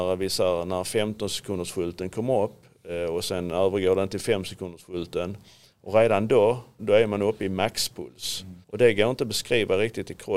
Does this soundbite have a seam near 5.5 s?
no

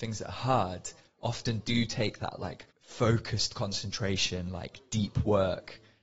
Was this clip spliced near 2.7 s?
yes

